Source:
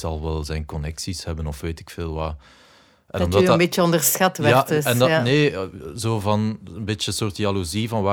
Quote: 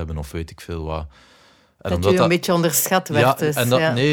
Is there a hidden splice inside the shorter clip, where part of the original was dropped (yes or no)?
no